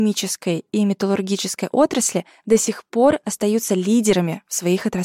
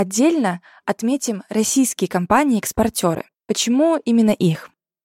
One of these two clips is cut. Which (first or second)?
second